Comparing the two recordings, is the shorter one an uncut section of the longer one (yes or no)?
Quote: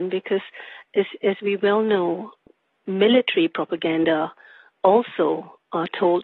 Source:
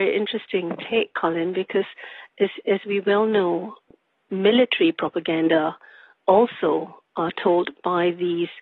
yes